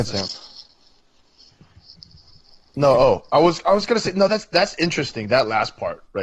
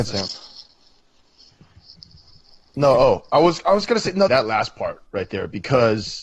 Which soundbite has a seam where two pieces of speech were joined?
second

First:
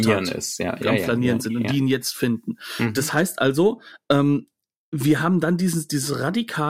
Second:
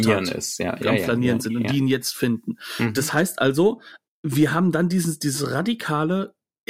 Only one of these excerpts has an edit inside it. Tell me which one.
second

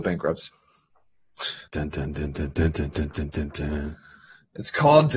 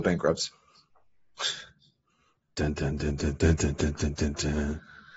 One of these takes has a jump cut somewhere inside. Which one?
first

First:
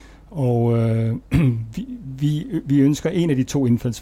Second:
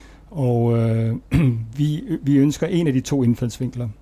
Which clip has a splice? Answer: second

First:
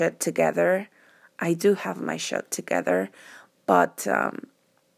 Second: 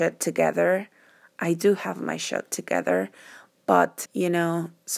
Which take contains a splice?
second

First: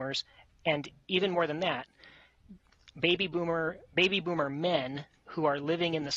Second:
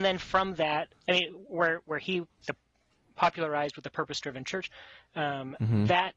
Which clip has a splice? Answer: second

